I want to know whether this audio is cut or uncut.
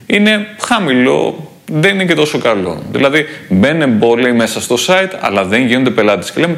uncut